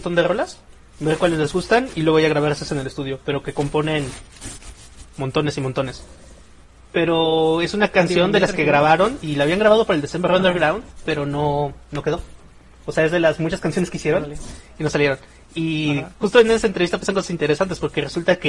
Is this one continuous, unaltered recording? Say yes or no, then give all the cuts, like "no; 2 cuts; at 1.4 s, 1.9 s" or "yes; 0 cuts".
no; 2 cuts; at 6.9 s, 9.2 s